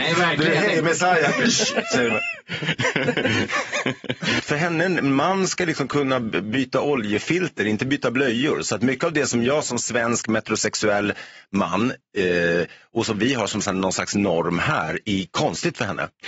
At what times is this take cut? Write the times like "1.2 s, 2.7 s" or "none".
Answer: 4.4 s, 15.0 s